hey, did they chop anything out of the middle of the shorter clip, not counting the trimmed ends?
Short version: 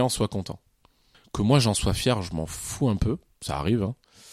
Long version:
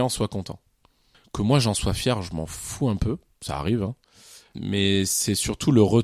no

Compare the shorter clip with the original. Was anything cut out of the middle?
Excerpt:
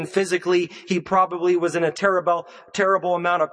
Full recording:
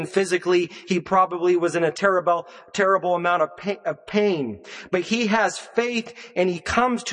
no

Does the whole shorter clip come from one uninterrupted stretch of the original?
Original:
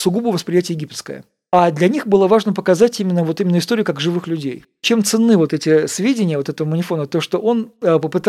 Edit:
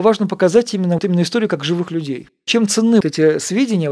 no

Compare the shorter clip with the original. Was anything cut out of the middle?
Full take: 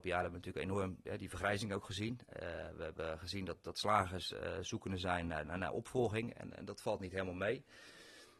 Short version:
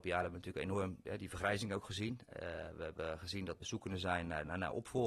yes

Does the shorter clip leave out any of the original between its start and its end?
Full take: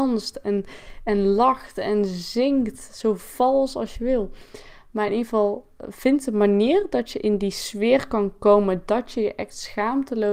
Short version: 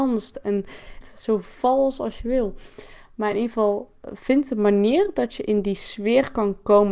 yes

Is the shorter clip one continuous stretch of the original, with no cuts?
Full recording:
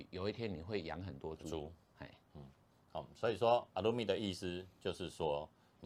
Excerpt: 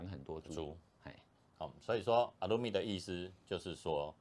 no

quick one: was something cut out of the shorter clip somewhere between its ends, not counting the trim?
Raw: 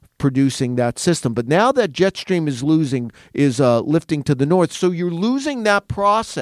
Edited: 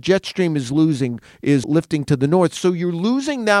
yes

